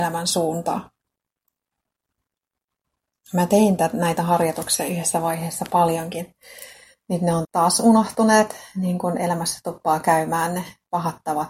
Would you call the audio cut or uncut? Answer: cut